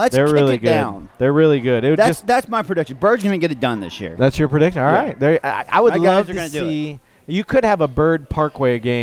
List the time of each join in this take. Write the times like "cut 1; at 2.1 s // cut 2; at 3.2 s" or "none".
none

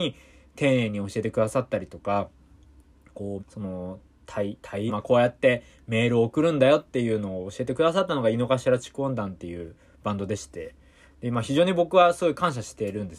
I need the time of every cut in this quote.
cut 1; at 3.4 s // cut 2; at 4.9 s

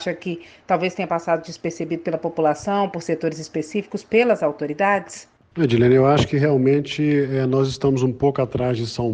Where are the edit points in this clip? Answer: none

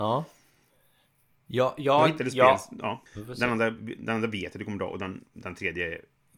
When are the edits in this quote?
cut 1; at 3.1 s

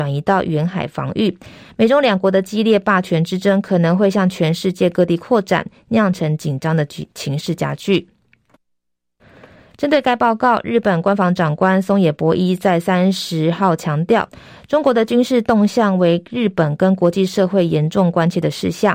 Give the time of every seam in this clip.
none

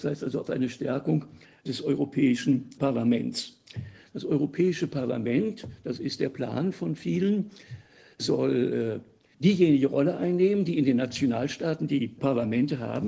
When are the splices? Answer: none

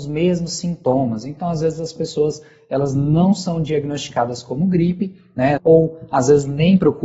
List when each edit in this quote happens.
cut 1; at 5.6 s

